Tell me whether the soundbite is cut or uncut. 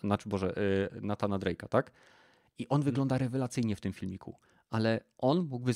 uncut